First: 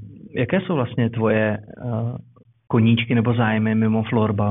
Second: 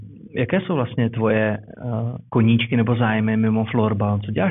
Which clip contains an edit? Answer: second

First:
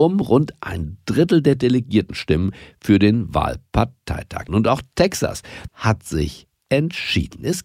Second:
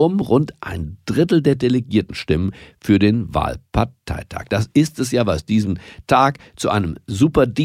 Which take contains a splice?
first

